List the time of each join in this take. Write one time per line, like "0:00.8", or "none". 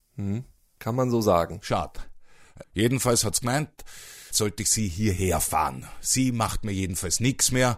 0:02.6
0:04.3